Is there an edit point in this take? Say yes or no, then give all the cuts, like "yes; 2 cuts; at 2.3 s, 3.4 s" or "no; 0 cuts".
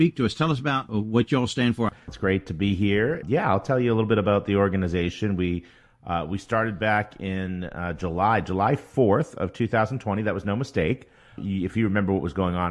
yes; 1 cut; at 2.1 s